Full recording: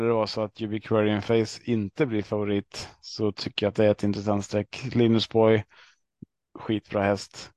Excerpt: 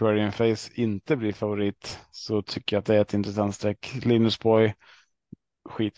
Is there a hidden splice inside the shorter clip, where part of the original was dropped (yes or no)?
no